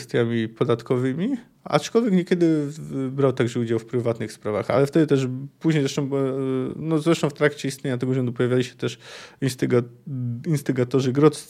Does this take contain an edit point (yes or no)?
no